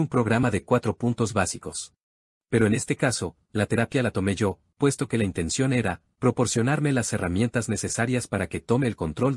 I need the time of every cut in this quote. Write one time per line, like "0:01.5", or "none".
0:02.4